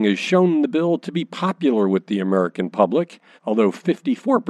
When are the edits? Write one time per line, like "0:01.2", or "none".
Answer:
0:03.4

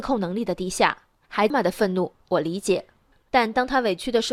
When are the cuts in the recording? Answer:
0:01.5

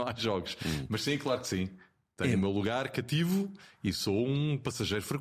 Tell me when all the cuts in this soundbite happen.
none

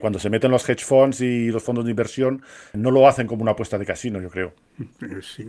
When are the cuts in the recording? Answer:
0:02.7

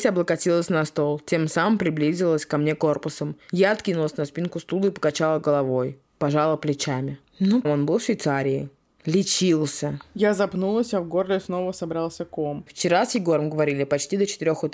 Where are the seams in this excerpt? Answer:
0:07.6
0:12.7

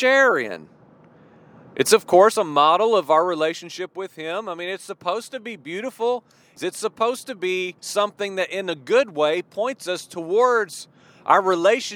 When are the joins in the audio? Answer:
0:06.6
0:07.8

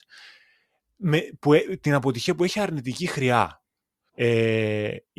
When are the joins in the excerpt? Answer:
0:04.1

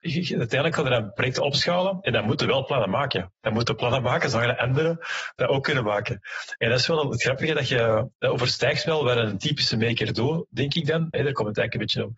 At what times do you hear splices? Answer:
0:08.1
0:11.1

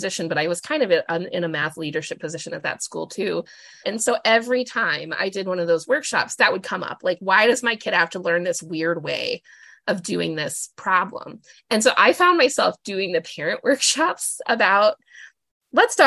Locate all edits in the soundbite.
0:03.8
0:11.5

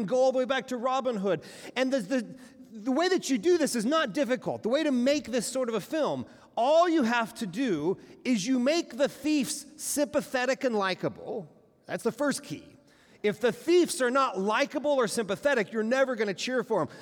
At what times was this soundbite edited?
none

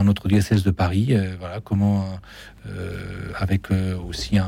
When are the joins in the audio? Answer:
none

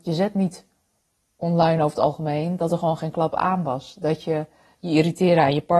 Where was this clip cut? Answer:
none

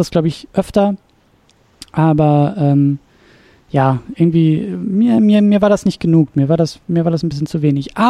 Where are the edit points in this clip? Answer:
none

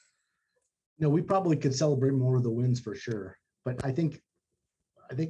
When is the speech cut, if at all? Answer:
0:03.4

